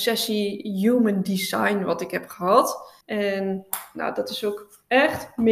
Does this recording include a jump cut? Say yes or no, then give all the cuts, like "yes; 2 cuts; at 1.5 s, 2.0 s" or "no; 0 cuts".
yes; 1 cut; at 3.0 s